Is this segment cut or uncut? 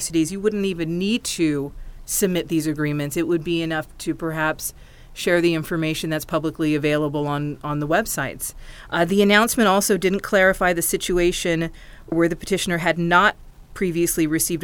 cut